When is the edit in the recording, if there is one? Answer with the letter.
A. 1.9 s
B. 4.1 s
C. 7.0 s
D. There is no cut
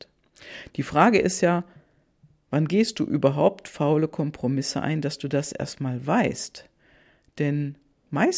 D